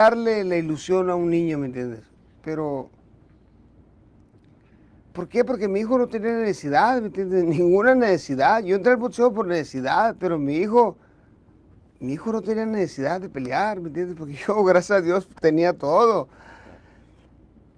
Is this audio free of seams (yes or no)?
no